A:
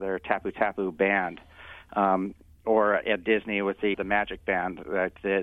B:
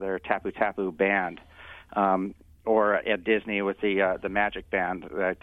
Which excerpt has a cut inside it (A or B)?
A